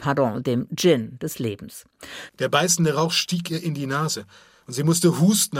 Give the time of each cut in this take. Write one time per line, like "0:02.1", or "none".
0:02.3